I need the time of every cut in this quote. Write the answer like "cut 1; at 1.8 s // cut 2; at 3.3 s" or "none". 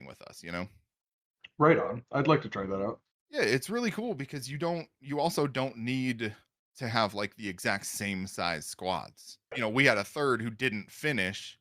cut 1; at 9.5 s